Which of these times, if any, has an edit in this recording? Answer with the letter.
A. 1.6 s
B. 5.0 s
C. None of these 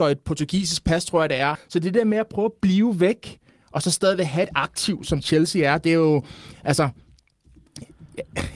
A